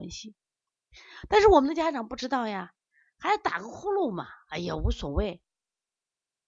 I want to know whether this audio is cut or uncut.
uncut